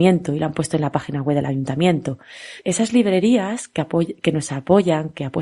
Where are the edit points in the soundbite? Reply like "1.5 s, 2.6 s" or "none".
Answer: 2.6 s